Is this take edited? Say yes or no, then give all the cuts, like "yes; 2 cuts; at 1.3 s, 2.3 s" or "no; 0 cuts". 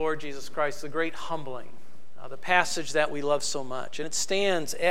no; 0 cuts